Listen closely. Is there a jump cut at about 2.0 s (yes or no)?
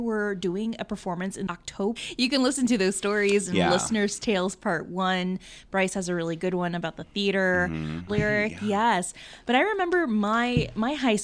yes